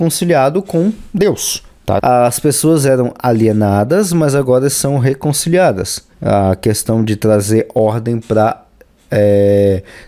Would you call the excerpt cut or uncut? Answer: cut